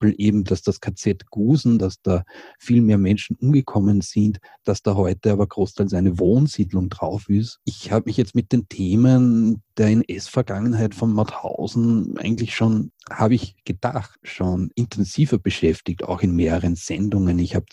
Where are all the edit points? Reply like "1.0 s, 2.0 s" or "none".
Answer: 1.8 s, 7.6 s